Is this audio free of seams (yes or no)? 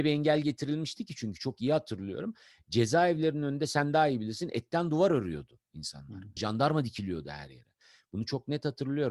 no